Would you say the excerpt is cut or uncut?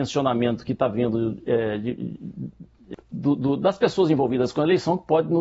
uncut